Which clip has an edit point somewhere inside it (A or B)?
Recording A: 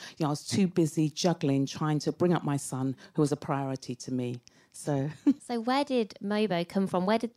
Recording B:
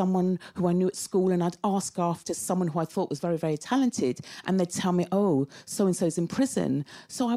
A